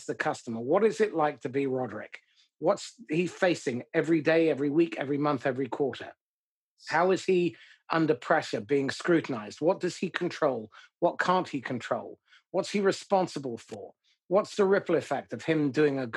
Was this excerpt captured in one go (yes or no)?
yes